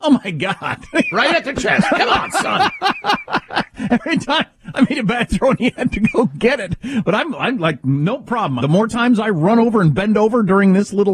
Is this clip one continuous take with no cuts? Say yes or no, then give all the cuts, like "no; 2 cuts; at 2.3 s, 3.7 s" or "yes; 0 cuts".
no; 2 cuts; at 1.1 s, 8.6 s